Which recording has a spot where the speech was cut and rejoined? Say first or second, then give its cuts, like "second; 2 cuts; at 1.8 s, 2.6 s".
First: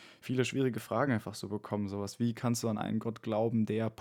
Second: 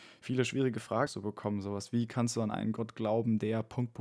second; 1 cut; at 1.1 s